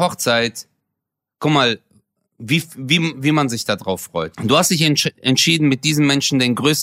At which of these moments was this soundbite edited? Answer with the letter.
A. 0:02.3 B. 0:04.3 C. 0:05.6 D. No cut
B